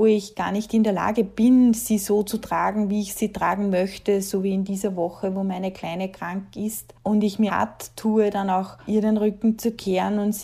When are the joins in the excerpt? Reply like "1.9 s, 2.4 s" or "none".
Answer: 7.5 s, 8.9 s